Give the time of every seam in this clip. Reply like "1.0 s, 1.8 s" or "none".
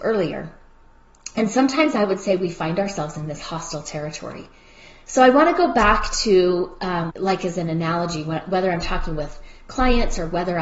7.1 s